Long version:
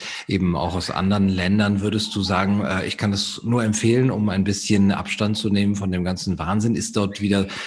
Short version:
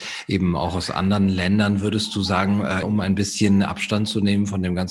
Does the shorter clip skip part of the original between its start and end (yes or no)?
yes